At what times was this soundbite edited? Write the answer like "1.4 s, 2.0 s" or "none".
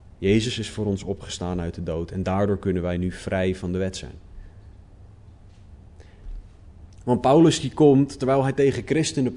6.9 s